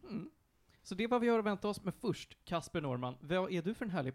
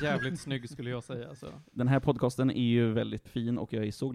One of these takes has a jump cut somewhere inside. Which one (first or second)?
second